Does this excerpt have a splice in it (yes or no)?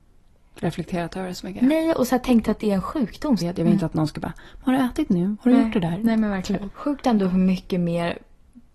yes